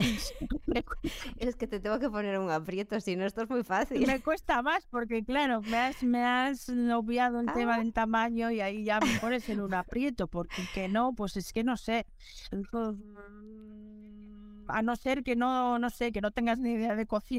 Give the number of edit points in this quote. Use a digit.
0